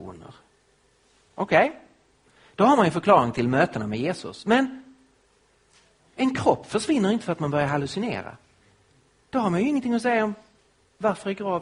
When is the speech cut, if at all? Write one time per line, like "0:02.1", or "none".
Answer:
none